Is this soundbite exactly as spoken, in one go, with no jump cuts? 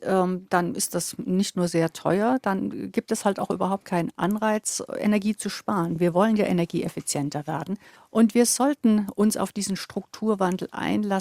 yes; 0 cuts

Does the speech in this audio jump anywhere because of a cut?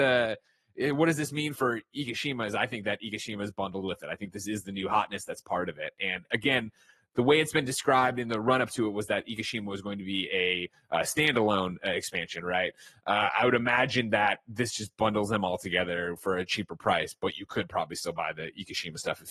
no; 0 cuts

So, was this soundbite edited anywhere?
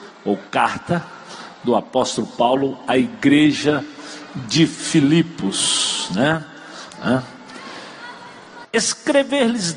yes; 2 cuts; at 6.9 s, 8.6 s

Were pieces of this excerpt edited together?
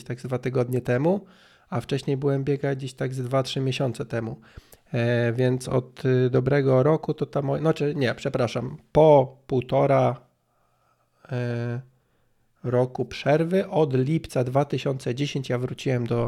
no; 0 cuts

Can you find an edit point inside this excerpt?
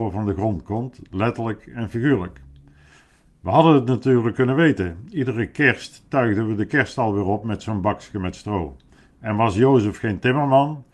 no; 0 cuts

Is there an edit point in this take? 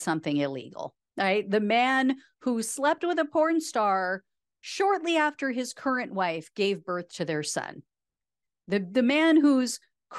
yes; 1 cut; at 1.1 s

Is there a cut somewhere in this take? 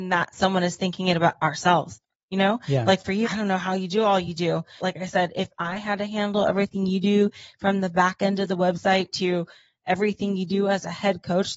yes; 2 cuts; at 3.2 s, 4.8 s

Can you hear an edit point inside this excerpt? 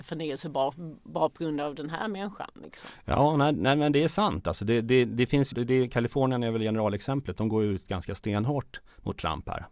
yes; 1 cut; at 5.5 s

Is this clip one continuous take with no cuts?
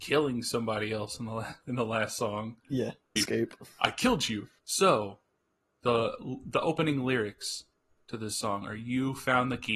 no; 2 cuts; at 3.2 s, 4.6 s

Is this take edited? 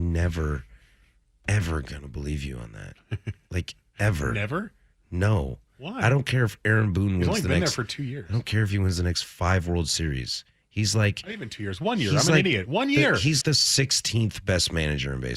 yes; 1 cut; at 13.4 s

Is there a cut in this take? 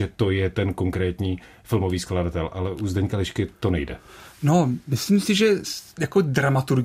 no; 0 cuts

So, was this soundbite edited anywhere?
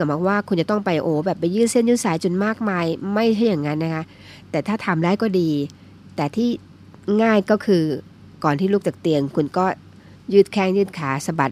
no; 0 cuts

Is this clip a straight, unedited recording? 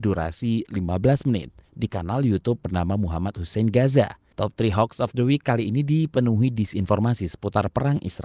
no; 1 cut; at 4.3 s

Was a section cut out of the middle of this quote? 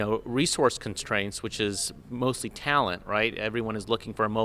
no; 0 cuts

